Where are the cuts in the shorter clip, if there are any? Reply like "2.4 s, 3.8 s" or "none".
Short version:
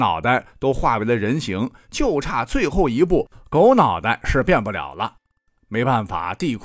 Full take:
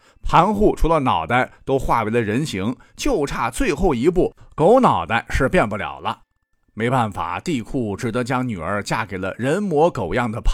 none